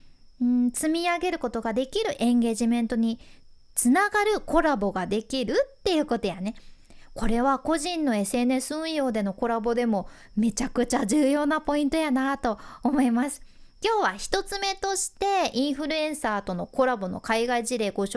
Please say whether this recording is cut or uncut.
uncut